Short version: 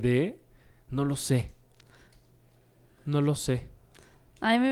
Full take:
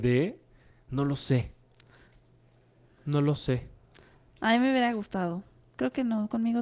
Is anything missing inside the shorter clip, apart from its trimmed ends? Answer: no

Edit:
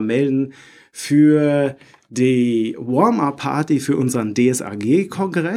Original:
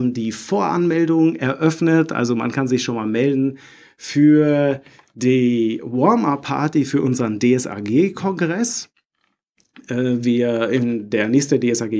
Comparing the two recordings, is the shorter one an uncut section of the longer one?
yes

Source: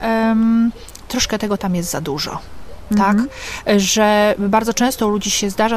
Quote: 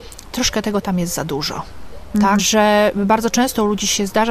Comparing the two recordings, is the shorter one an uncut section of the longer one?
no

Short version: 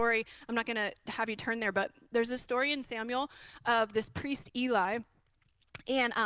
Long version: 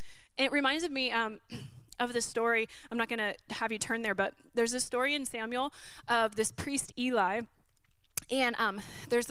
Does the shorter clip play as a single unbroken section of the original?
yes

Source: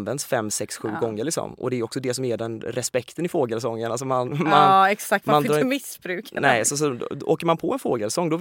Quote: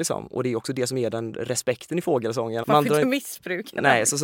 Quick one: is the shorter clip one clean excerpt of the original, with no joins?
no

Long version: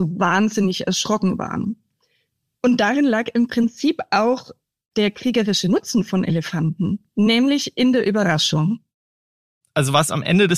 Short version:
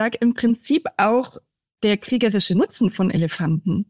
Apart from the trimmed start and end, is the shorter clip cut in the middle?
no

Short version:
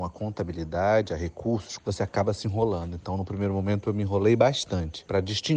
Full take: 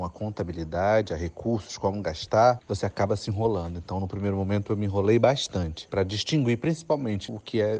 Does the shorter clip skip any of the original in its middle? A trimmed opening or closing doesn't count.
yes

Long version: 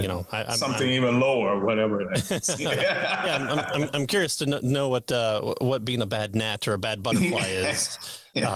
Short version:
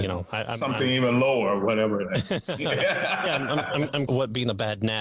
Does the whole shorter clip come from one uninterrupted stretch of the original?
no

